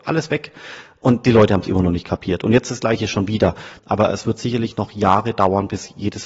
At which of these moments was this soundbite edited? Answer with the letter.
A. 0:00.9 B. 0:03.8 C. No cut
B